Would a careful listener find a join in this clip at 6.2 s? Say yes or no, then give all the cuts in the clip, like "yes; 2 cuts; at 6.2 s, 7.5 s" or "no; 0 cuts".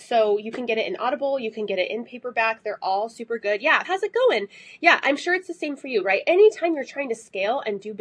no; 1 cut; at 3.8 s